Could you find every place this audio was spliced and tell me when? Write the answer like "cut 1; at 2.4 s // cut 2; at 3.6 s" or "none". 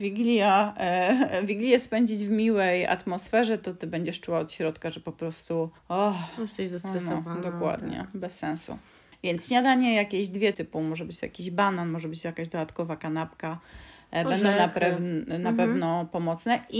cut 1; at 5.8 s // cut 2; at 10.5 s